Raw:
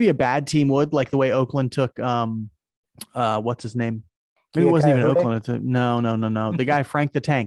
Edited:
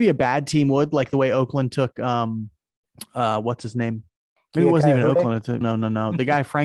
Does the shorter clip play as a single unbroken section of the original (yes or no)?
no